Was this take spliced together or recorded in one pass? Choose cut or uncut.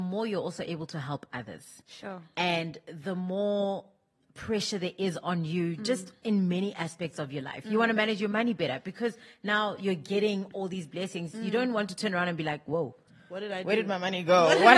uncut